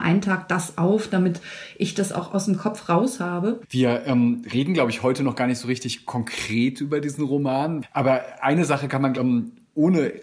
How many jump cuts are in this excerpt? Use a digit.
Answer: 2